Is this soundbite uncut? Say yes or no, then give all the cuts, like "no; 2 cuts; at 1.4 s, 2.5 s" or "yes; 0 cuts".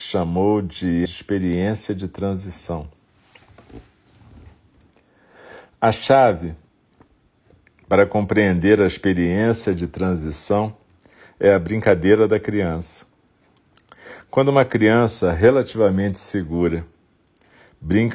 no; 1 cut; at 1.1 s